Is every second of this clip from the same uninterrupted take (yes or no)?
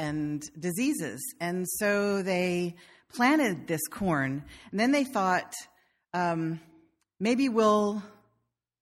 yes